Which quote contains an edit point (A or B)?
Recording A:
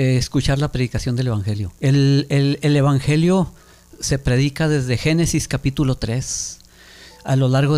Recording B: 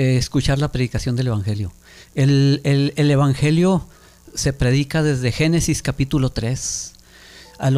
A